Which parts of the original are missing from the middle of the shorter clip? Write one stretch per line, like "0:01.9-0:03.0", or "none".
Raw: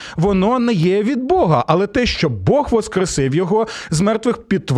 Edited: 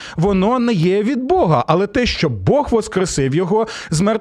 none